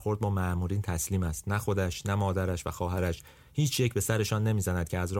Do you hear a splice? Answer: yes; 1 cut; at 2.0 s

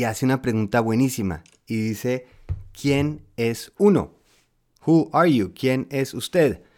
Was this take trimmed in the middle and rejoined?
no; 0 cuts

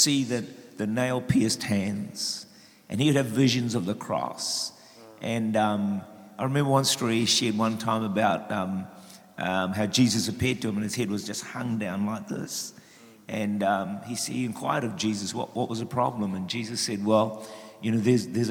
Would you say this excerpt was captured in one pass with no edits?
yes; 0 cuts

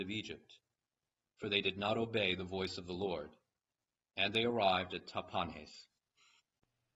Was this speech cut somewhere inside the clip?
no; 0 cuts

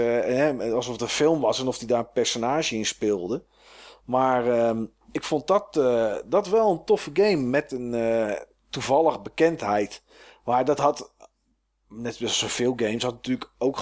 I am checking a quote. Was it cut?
no; 0 cuts

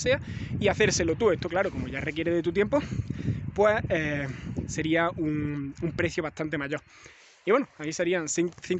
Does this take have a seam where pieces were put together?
no; 0 cuts

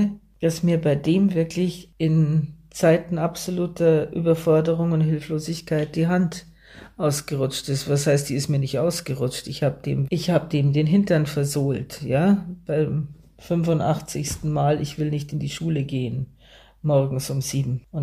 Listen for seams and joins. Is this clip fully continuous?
no; 1 cut; at 10.1 s

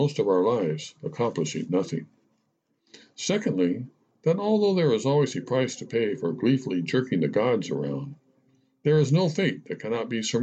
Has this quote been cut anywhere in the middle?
no; 0 cuts

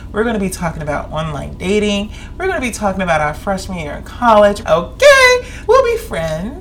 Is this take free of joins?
no; 2 cuts; at 4.6 s, 5.7 s

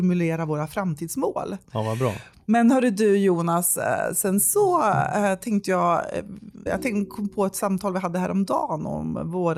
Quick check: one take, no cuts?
no; 2 cuts; at 1.6 s, 6.7 s

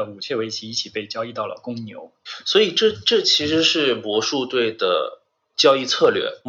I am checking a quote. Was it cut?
no; 0 cuts

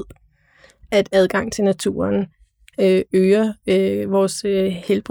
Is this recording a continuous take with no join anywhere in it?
yes; 0 cuts

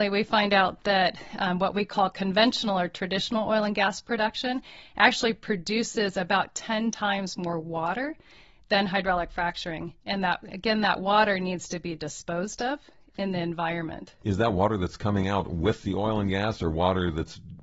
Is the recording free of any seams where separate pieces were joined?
yes; 0 cuts

